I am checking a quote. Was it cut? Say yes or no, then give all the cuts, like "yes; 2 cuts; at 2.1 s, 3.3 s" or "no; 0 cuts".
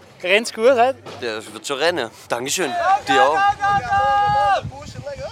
yes; 1 cut; at 2.3 s